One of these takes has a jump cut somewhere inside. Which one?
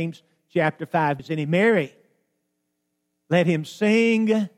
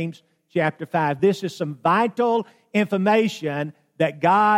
first; 1 cut; at 1.2 s

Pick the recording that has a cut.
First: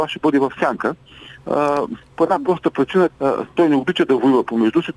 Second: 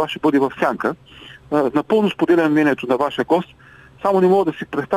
first; 2 cuts; at 1.4 s, 3.1 s

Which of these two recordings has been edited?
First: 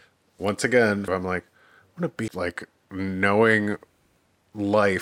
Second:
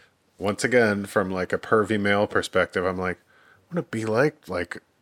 first; 2 cuts; at 1.1 s, 2.3 s

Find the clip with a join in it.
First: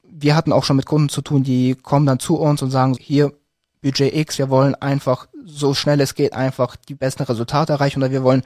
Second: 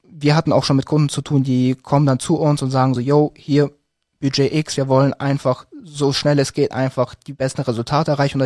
first; 1 cut; at 3.0 s

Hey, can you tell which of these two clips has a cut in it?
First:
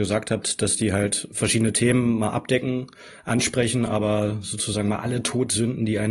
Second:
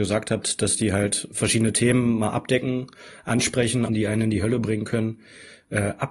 second; 1 cut; at 3.9 s

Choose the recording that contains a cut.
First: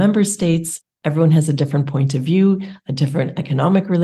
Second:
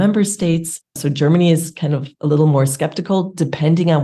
second; 1 cut; at 1.0 s

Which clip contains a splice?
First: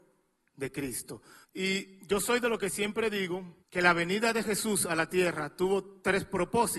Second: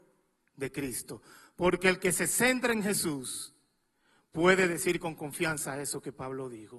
first; 2 cuts; at 1.4 s, 3.6 s

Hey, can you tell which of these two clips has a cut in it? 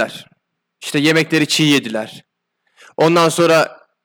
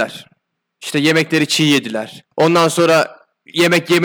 second; 1 cut; at 2.3 s

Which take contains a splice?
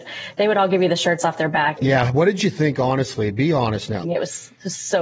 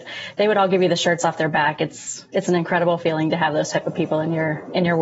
first; 2 cuts; at 1.8 s, 4.0 s

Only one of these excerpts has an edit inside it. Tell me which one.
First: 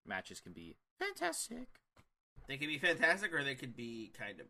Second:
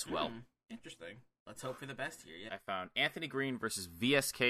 second; 2 cuts; at 1.4 s, 2.5 s

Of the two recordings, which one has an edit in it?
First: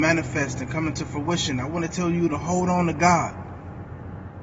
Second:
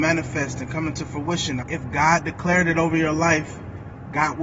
second; 1 cut; at 1.6 s

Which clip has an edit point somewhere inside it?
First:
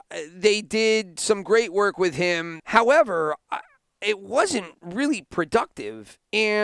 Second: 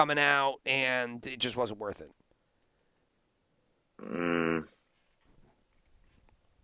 first; 1 cut; at 2.6 s

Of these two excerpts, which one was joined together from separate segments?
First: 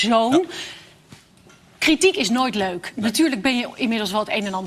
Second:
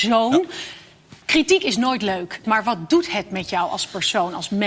second; 2 cuts; at 1.2 s, 2.4 s

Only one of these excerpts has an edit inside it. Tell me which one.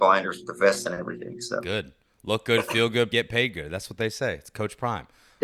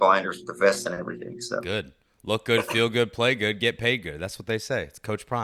first; 1 cut; at 3.1 s

